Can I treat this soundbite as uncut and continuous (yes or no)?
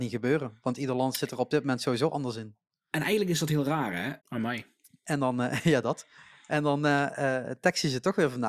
no